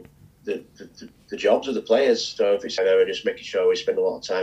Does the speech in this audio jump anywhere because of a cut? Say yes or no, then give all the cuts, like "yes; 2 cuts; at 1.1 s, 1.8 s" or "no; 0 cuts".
yes; 1 cut; at 2.8 s